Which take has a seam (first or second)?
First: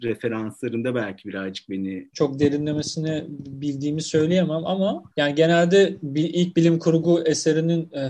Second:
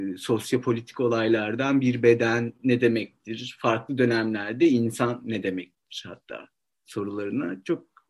first